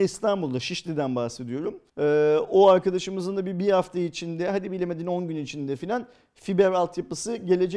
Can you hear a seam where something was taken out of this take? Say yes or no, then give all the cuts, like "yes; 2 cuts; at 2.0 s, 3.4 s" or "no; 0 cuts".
yes; 1 cut; at 1.9 s